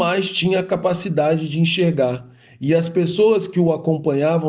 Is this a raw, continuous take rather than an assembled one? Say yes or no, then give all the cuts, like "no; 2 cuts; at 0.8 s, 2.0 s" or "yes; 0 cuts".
yes; 0 cuts